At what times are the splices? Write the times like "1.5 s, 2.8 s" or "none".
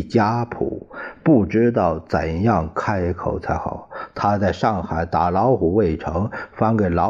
none